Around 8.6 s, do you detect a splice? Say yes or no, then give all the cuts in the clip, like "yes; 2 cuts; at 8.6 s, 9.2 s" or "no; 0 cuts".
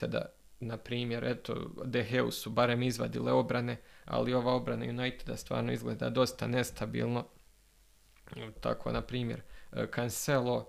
yes; 1 cut; at 8.6 s